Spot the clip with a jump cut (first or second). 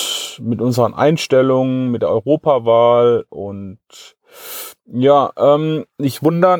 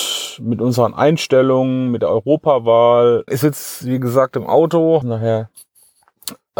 second